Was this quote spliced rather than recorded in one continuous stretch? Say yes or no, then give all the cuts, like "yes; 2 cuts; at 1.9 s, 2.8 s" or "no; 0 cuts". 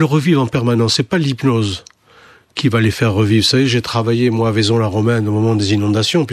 no; 0 cuts